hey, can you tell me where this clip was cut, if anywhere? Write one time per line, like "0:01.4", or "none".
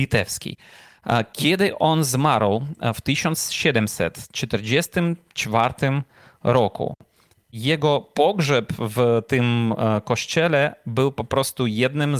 none